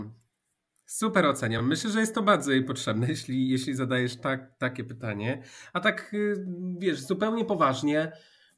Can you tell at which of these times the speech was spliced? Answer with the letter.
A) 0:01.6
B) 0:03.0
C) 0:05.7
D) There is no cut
D